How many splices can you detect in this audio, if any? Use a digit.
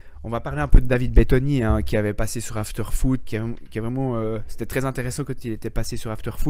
1